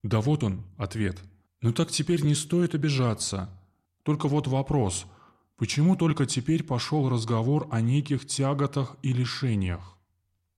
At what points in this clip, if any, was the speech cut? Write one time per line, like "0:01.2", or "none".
0:01.5
0:03.8

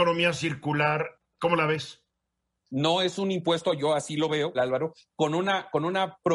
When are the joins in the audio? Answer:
0:02.6
0:04.5

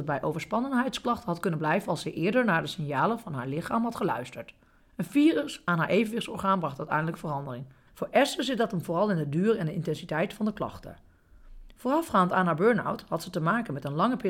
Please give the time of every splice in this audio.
0:04.8
0:07.9

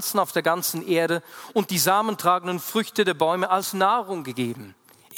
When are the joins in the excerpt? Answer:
none

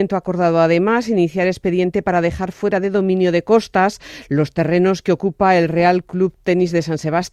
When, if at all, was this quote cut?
none

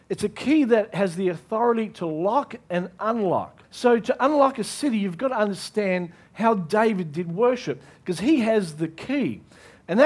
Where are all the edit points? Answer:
0:03.6

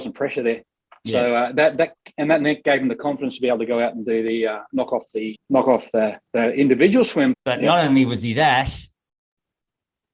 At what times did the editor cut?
0:05.4
0:07.3

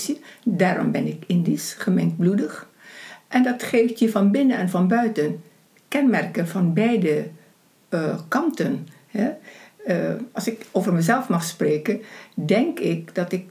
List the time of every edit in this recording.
none

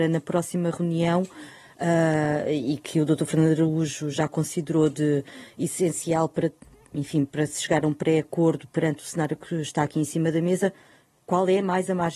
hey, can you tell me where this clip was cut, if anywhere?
none

